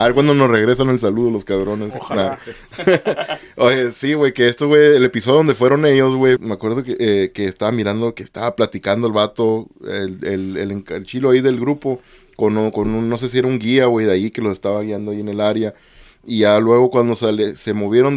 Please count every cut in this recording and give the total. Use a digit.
1